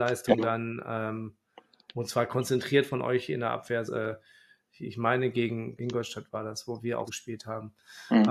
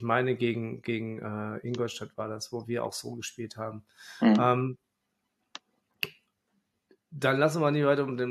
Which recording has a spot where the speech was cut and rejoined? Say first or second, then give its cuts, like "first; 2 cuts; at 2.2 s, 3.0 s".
first; 3 cuts; at 3.9 s, 5.8 s, 7.1 s